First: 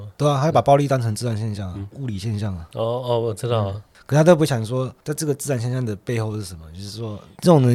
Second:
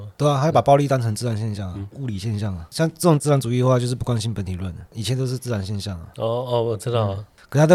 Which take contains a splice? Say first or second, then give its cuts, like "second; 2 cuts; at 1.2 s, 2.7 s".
first; 1 cut; at 2.7 s